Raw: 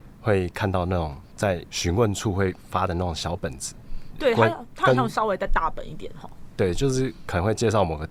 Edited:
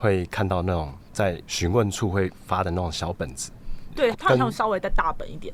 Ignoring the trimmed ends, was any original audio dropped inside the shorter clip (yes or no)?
yes